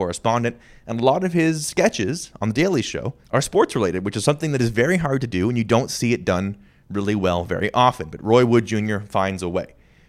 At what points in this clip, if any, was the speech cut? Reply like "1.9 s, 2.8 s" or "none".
3.2 s